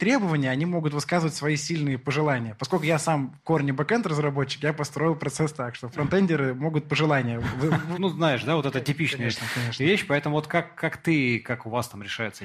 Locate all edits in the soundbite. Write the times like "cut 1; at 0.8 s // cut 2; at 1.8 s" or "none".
cut 1; at 7.9 s // cut 2; at 10.5 s